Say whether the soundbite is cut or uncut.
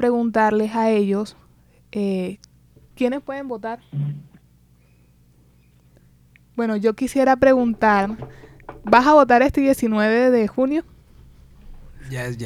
uncut